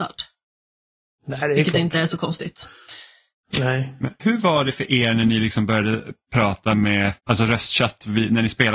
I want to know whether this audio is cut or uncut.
cut